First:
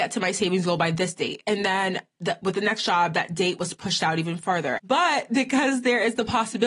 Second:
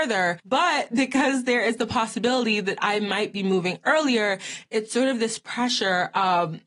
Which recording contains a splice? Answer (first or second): first